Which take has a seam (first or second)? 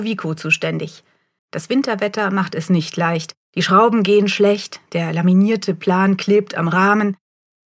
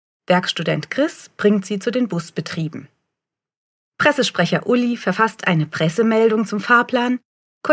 first